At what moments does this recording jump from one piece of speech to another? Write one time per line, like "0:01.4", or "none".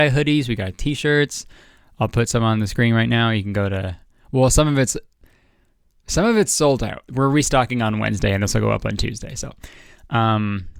0:07.1